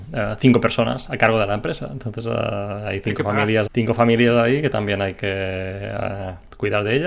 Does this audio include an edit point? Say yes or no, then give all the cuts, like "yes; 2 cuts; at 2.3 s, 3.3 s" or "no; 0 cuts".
yes; 1 cut; at 3.7 s